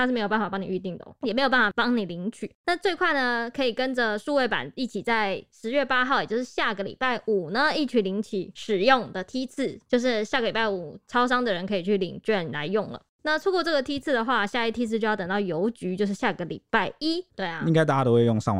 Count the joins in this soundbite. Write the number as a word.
one